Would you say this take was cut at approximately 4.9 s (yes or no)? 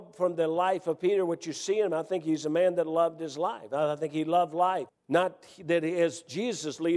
yes